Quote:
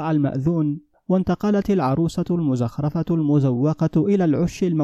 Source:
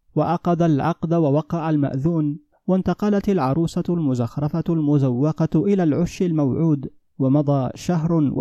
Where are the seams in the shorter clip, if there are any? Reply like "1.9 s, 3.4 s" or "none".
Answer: none